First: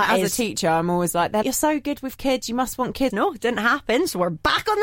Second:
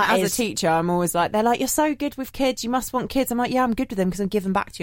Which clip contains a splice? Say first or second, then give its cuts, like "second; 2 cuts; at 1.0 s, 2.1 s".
first; 2 cuts; at 1.4 s, 3.1 s